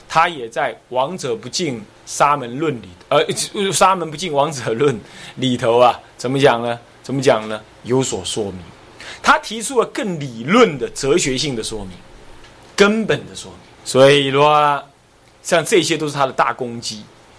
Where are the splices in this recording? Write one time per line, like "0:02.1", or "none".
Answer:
0:13.8